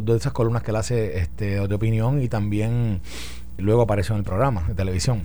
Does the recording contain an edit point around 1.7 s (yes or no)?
no